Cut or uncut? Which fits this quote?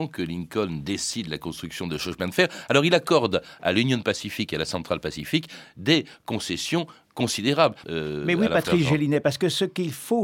cut